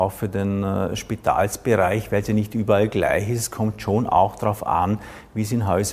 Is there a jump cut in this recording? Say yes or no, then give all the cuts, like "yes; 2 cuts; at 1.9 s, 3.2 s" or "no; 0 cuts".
no; 0 cuts